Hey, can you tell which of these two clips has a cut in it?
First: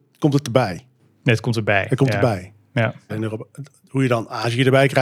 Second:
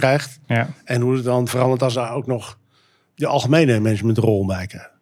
first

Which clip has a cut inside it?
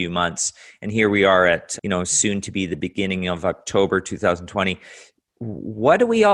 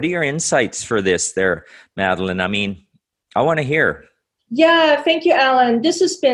first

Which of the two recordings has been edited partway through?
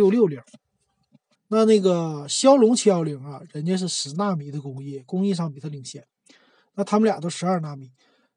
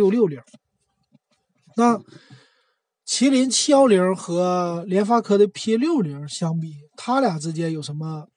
first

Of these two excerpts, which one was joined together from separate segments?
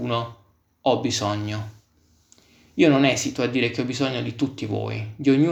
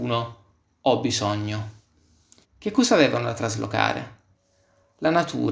second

